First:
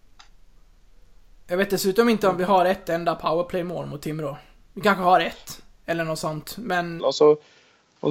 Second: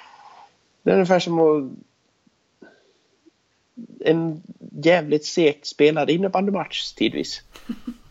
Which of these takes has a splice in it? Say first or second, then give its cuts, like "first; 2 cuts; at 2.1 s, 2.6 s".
first; 1 cut; at 7.0 s